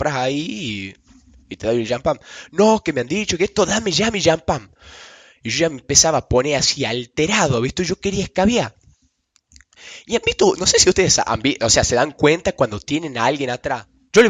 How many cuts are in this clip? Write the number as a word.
zero